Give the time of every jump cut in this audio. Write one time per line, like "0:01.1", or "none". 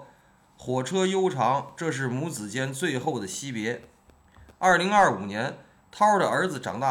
none